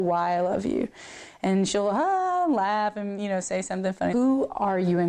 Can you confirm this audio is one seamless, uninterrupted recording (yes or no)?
no